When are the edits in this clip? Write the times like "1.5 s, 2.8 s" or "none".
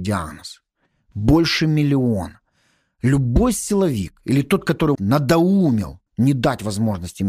5.0 s, 6.1 s